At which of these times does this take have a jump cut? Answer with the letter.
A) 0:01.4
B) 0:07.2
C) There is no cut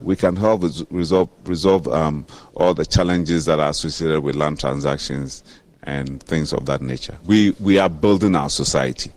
B